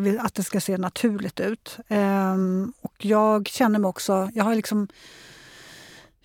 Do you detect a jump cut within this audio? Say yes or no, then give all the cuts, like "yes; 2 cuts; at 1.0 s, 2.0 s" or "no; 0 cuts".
no; 0 cuts